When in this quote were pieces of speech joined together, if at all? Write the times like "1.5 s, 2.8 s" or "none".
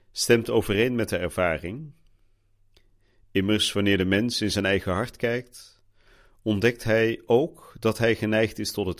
none

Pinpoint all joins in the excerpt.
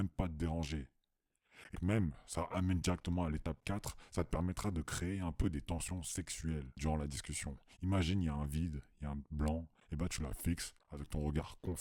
1.7 s

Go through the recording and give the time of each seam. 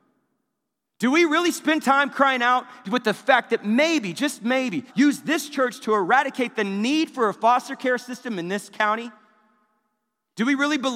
4.9 s

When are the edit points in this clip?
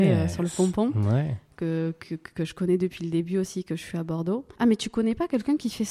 4.5 s

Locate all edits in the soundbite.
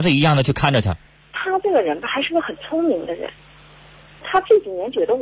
4.2 s

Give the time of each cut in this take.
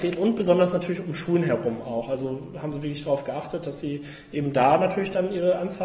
none

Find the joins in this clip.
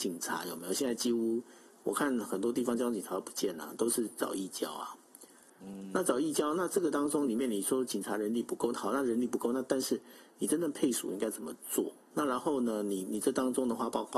none

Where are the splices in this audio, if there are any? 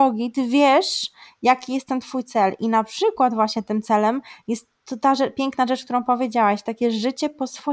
none

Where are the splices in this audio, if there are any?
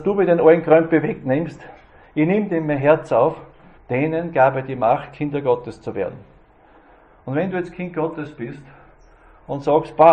3.8 s

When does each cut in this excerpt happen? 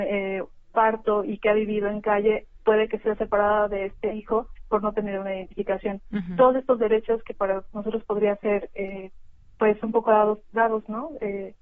none

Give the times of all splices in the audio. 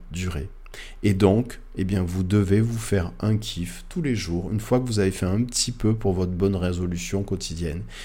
none

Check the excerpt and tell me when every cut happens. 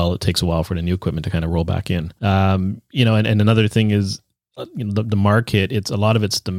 2.2 s

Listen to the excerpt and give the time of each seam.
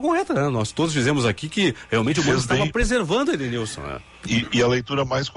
none

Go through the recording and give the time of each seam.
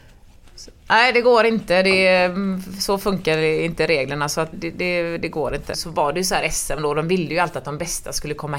4.5 s, 5.7 s

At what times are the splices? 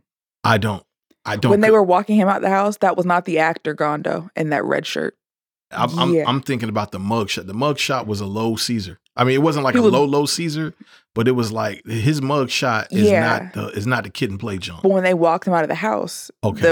5.7 s

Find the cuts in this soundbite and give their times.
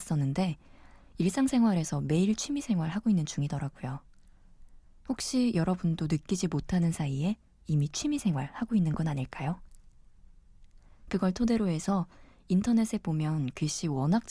10.9 s

